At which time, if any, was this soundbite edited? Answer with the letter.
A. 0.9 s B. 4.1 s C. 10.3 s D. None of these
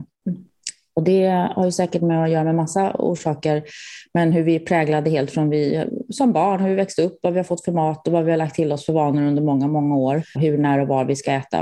C